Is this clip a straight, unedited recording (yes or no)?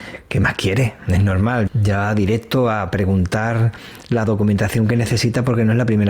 no